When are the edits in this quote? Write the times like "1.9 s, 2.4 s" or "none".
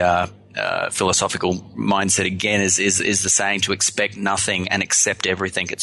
none